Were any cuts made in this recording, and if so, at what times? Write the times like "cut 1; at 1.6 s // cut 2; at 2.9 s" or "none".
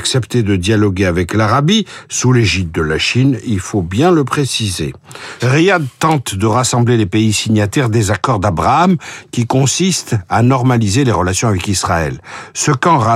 cut 1; at 5.4 s